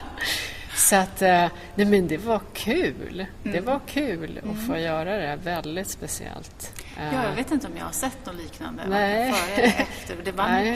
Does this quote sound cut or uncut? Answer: uncut